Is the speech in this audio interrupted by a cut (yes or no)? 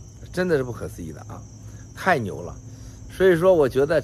no